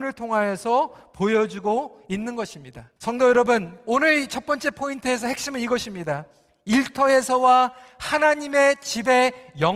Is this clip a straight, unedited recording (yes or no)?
no